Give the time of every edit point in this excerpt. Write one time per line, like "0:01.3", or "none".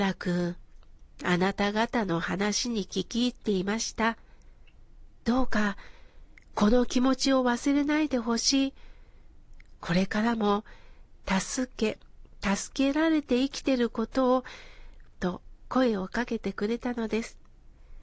0:15.1

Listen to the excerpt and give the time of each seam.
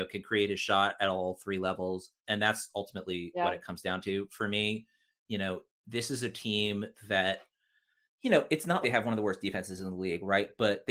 0:02.2
0:08.8

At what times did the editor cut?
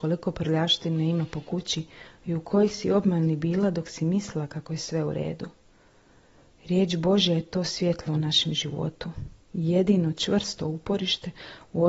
none

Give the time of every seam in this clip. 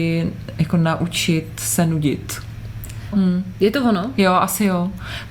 0:03.1

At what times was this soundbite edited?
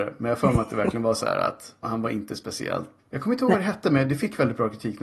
0:01.8
0:03.0

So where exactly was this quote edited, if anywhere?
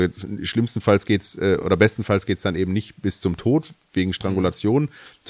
none

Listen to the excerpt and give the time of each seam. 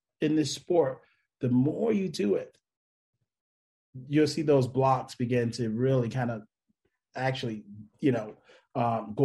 0:07.9

